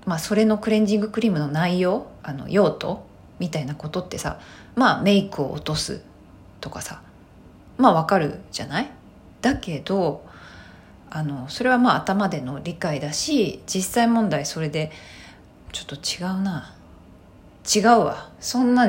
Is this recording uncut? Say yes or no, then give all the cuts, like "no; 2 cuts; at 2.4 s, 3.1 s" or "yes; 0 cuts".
no; 2 cuts; at 2.2 s, 15.7 s